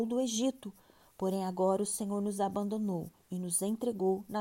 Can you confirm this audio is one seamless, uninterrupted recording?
yes; 0 cuts

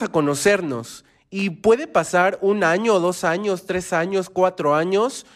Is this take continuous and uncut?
yes; 0 cuts

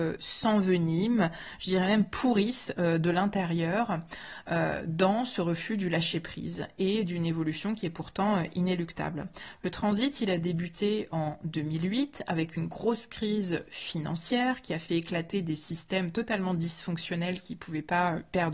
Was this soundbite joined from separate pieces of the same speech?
no; 0 cuts

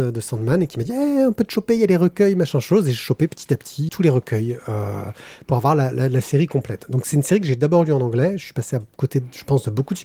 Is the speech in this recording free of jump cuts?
no; 1 cut; at 3.9 s

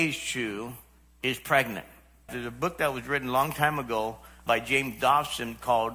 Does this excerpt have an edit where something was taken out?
yes; 2 cuts; at 2.3 s, 4.5 s

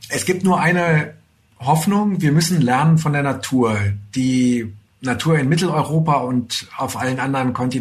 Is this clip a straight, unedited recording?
yes; 0 cuts

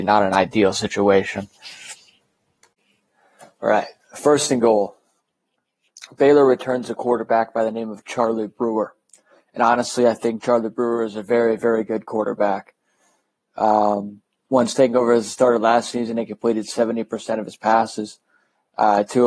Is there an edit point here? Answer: no; 0 cuts

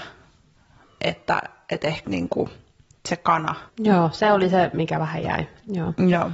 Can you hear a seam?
yes; 2 cuts; at 2.0 s, 3.7 s

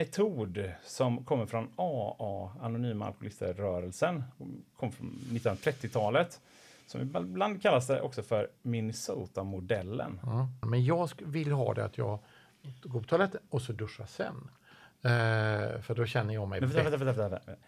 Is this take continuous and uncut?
no; 1 cut; at 10.6 s

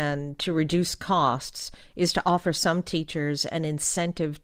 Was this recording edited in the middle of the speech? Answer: no; 0 cuts

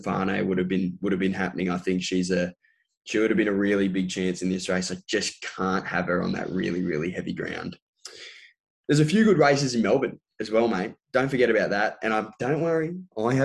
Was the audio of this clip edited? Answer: no; 0 cuts

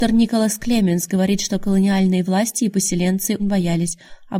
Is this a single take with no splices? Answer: no; 1 cut; at 3.4 s

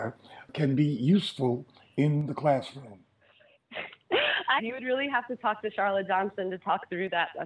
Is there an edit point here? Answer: yes; 1 cut; at 4.6 s

